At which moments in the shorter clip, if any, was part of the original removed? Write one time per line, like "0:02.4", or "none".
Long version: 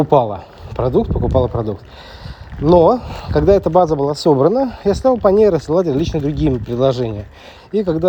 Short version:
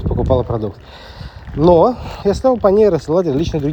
0:02.2